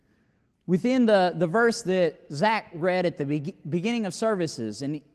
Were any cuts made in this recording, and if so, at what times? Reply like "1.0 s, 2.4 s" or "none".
none